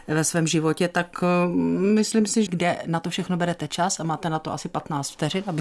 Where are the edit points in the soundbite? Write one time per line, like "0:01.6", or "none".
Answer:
0:02.5